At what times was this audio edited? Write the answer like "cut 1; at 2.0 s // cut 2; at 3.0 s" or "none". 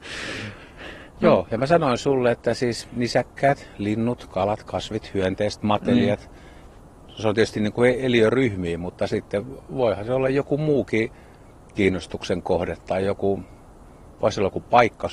none